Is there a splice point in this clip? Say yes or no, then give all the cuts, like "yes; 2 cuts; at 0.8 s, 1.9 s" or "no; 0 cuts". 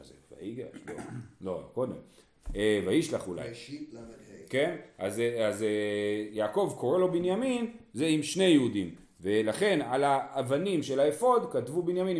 no; 0 cuts